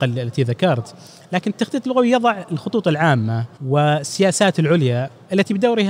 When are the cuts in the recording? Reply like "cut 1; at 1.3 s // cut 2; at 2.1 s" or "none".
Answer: cut 1; at 3.6 s